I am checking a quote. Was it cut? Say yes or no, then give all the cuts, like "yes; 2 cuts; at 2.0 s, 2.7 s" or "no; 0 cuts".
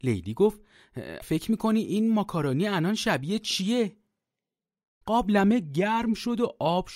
yes; 2 cuts; at 1.2 s, 5.0 s